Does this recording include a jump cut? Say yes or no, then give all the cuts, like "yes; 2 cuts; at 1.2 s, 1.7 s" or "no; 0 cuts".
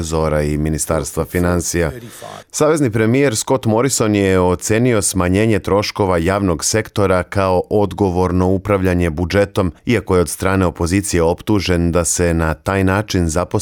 yes; 2 cuts; at 2.4 s, 9.8 s